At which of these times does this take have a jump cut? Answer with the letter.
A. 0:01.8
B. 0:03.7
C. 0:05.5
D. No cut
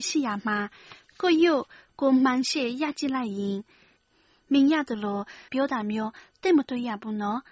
C